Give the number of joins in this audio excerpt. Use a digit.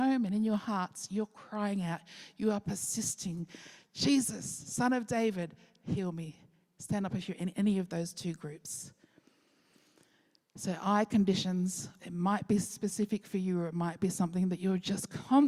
1